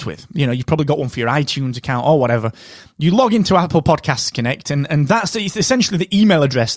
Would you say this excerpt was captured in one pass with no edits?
yes; 0 cuts

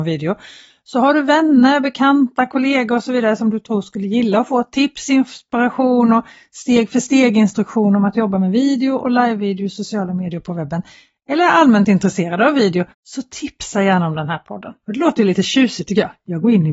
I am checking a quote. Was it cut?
yes; 2 cuts; at 12.9 s, 14.8 s

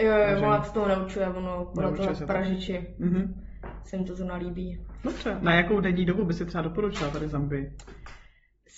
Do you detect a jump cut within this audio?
no; 0 cuts

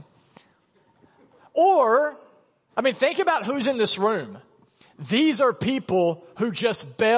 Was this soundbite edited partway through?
no; 0 cuts

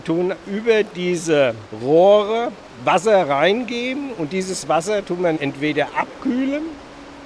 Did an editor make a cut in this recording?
no; 0 cuts

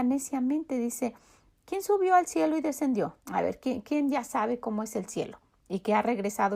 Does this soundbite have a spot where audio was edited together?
no; 0 cuts

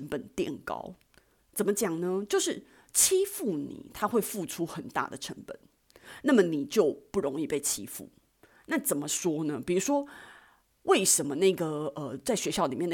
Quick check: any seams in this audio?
no; 0 cuts

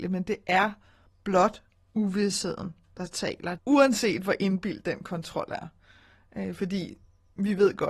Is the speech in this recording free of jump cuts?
no; 1 cut; at 3.6 s

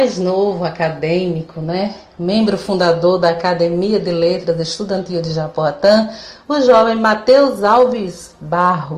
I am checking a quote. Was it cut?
no; 0 cuts

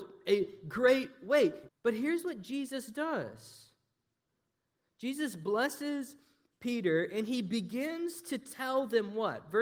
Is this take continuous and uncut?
no; 1 cut; at 1.7 s

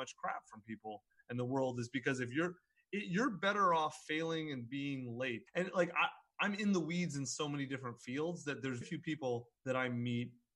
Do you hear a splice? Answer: yes; 2 cuts; at 5.5 s, 8.8 s

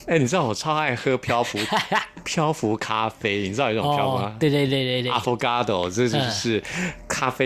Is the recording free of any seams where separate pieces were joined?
yes; 0 cuts

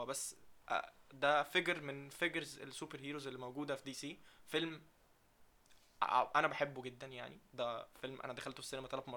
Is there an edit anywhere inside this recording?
no; 0 cuts

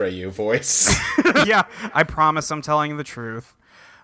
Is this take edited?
yes; 1 cut; at 1.4 s

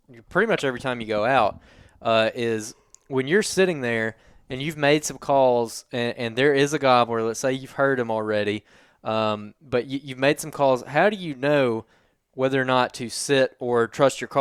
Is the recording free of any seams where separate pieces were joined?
yes; 0 cuts

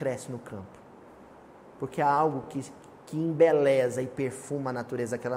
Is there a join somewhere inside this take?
no; 0 cuts

